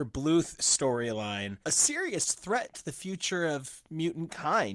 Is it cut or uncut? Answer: cut